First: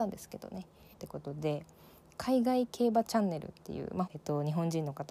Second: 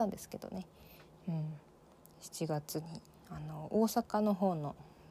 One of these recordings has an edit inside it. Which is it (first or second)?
first